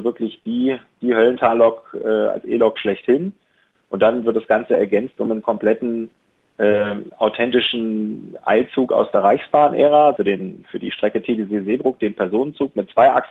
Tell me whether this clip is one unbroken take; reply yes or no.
no